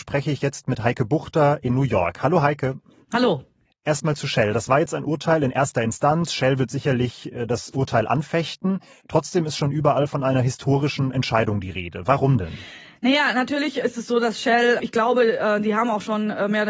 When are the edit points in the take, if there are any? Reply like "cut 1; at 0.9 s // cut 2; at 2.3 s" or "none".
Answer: cut 1; at 14.8 s